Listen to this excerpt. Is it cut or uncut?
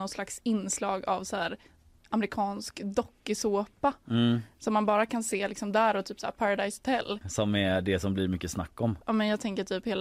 cut